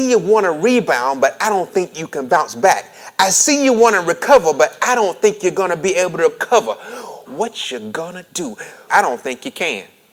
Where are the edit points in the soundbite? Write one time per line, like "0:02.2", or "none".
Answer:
0:07.3
0:08.9